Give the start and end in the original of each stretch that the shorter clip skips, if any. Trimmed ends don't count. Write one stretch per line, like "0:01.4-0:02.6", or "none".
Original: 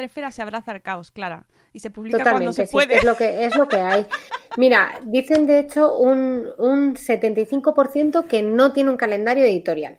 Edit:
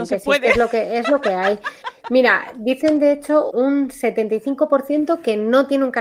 0:06.0-0:06.6